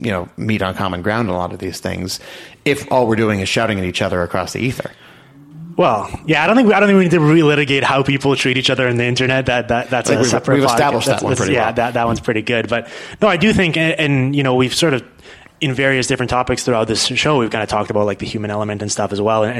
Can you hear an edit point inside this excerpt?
no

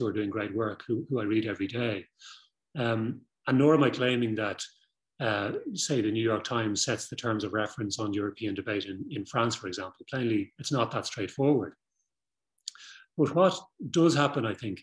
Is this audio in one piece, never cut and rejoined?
yes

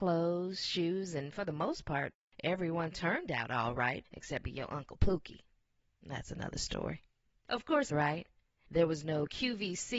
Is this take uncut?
no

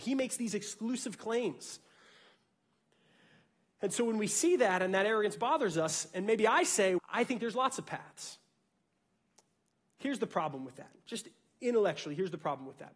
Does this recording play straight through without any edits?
no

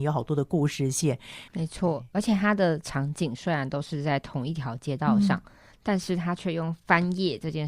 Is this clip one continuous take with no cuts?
no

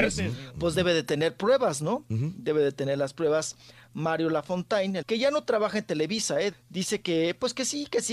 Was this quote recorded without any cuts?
no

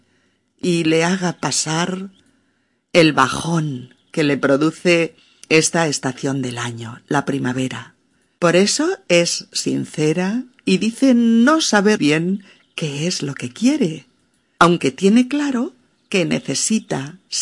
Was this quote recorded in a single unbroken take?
no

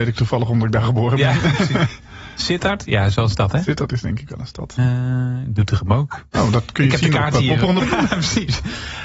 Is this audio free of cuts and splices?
no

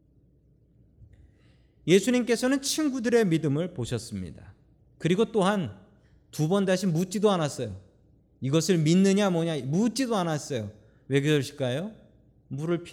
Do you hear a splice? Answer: no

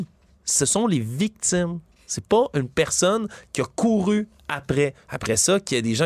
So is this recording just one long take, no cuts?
no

